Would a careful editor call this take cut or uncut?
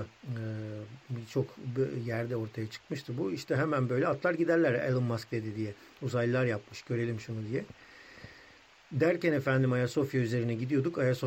uncut